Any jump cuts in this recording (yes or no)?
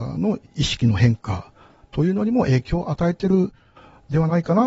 no